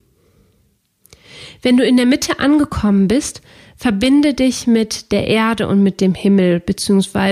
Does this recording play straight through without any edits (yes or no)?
yes